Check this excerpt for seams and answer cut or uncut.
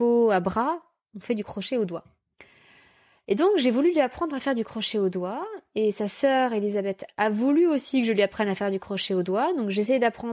uncut